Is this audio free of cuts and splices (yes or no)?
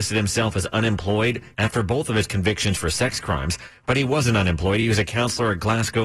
yes